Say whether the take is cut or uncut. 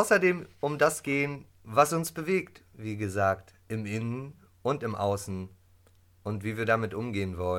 uncut